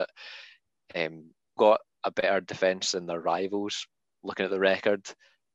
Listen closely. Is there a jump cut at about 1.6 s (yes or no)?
yes